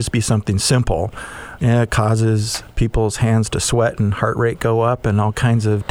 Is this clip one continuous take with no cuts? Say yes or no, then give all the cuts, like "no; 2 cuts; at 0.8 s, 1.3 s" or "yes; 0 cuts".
no; 1 cut; at 1.6 s